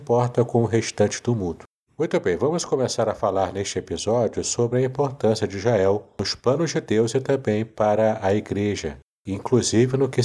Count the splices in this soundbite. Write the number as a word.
one